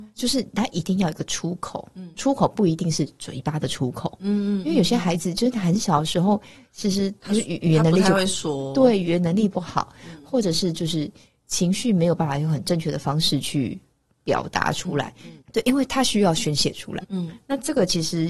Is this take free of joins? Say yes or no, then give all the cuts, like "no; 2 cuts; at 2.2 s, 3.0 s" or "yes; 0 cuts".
no; 2 cuts; at 15.4 s, 17.0 s